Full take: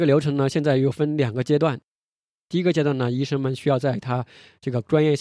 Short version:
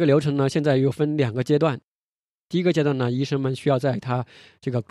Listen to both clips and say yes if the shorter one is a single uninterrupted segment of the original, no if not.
yes